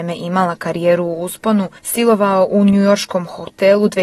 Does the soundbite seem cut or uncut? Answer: cut